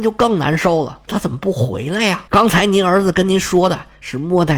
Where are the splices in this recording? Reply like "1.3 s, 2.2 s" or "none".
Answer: 1.1 s, 2.3 s